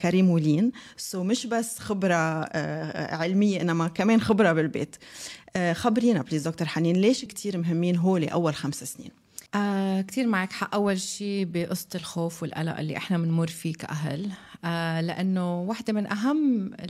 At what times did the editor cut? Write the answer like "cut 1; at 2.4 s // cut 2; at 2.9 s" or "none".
cut 1; at 7.3 s // cut 2; at 9.5 s